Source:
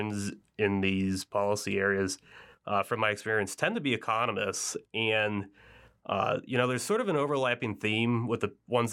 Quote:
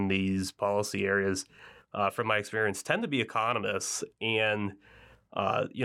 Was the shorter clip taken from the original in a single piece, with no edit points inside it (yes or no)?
yes